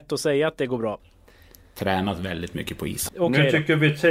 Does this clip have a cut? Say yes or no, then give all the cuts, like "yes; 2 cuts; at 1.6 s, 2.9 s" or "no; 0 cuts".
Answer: yes; 2 cuts; at 1.0 s, 3.1 s